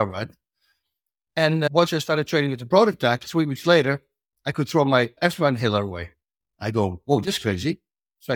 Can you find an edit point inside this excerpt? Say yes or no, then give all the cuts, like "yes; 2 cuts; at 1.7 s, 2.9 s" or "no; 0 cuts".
no; 0 cuts